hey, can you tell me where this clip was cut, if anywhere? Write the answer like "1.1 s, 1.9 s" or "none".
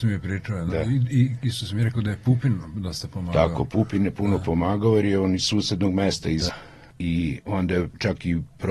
6.5 s